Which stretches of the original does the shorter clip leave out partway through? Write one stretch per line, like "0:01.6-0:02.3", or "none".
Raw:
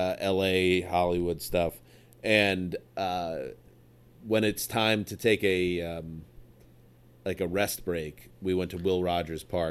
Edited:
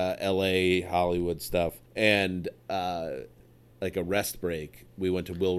0:01.9-0:02.1
0:04.0-0:07.2